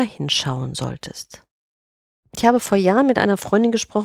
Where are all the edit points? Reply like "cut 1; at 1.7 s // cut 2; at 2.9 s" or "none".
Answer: none